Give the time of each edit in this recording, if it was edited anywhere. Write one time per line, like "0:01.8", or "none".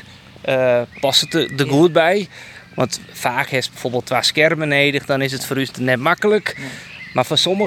0:05.7